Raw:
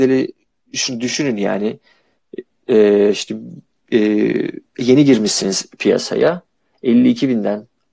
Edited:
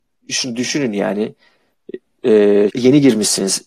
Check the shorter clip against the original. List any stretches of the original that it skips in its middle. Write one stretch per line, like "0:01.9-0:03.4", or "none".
0:03.1-0:04.7